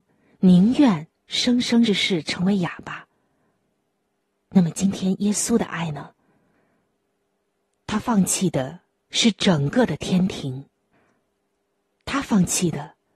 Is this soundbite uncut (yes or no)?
no